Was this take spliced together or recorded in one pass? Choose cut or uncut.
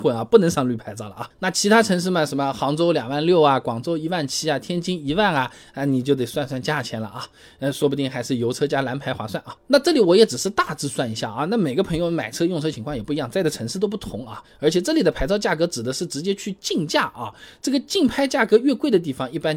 uncut